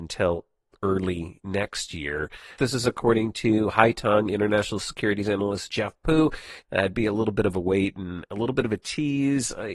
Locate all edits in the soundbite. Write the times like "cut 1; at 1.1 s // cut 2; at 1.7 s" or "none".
cut 1; at 2.6 s // cut 2; at 6.6 s